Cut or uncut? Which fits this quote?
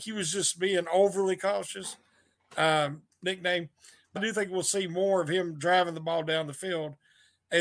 cut